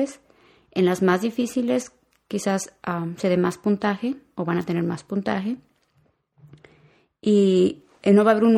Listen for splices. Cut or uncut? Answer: uncut